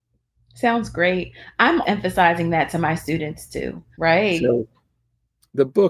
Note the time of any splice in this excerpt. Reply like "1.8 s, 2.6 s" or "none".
1.8 s, 3.9 s